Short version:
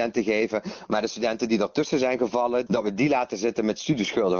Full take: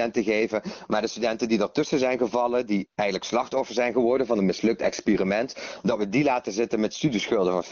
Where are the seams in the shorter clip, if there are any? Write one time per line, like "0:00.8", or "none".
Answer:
0:02.7